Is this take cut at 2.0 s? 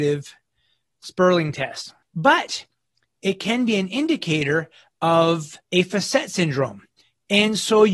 yes; 2 cuts; at 2.0 s, 5.6 s

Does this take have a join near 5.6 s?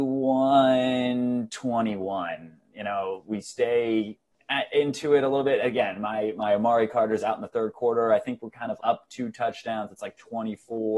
no; 1 cut; at 8.8 s

